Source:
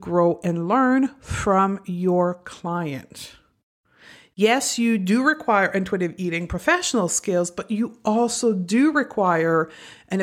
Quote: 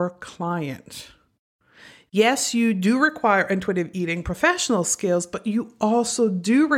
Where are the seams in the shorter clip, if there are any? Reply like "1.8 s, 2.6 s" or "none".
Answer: none